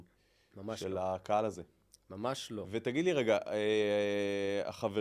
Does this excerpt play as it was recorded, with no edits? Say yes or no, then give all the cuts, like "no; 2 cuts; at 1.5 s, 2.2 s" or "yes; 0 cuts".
yes; 0 cuts